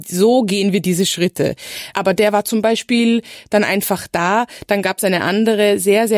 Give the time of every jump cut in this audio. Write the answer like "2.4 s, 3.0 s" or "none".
1.9 s